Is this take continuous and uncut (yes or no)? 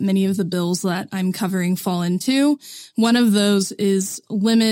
yes